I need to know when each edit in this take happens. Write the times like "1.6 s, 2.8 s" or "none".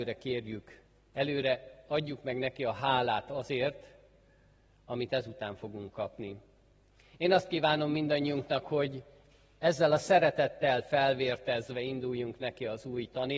none